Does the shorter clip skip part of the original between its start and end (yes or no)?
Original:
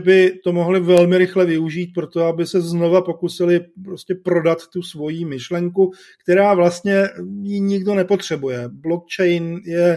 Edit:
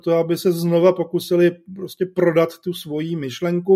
no